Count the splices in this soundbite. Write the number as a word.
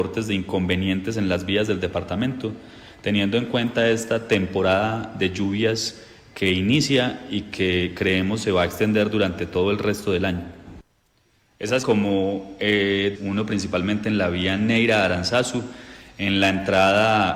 two